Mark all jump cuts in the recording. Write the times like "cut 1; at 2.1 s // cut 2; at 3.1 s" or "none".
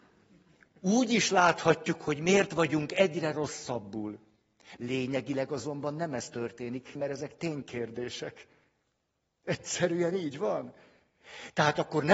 cut 1; at 4.8 s // cut 2; at 7.0 s